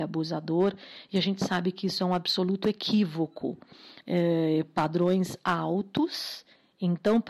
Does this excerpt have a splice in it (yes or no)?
yes